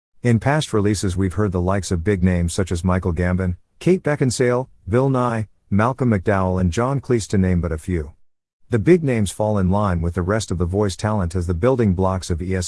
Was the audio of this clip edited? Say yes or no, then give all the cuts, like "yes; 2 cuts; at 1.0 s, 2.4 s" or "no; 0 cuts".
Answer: no; 0 cuts